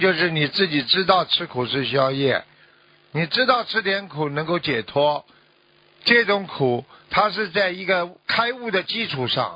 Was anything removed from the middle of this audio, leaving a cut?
no; 0 cuts

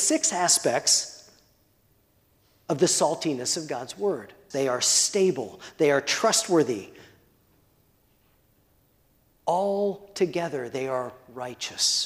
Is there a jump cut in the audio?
yes; 1 cut; at 4.5 s

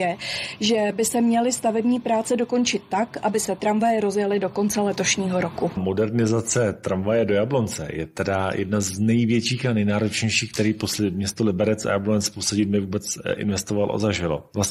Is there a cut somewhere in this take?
no; 0 cuts

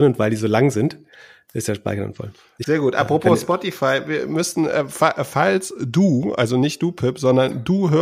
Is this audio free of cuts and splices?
no; 1 cut; at 2.6 s

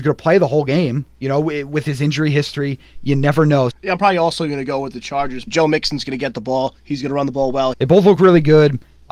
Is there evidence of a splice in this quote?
yes; 3 cuts; at 3.7 s, 5.5 s, 7.7 s

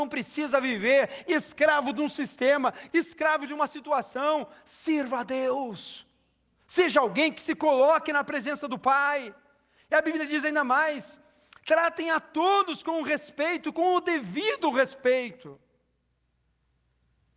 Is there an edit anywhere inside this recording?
yes; 1 cut; at 2.9 s

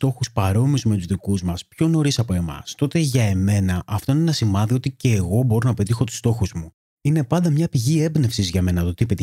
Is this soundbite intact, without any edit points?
no; 1 cut; at 7.0 s

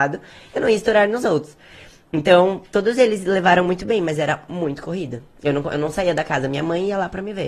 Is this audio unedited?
yes; 0 cuts

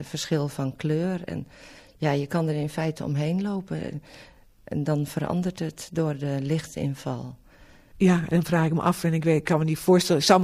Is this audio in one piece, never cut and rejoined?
no; 1 cut; at 7.9 s

